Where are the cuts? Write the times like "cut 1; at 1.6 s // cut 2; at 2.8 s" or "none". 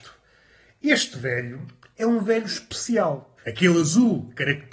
cut 1; at 3.4 s